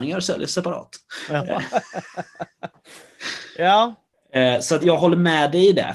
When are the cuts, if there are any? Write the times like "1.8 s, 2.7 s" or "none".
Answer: 4.8 s